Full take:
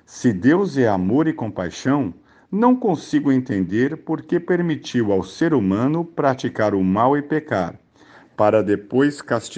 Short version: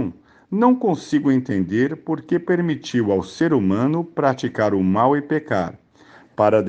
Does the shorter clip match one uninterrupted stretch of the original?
yes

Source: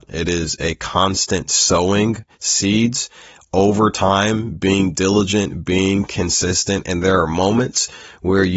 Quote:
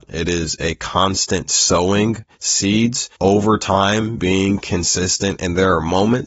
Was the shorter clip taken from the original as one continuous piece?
no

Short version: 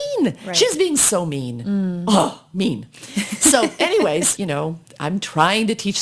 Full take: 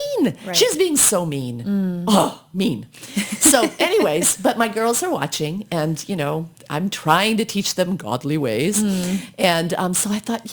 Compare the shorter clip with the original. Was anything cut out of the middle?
yes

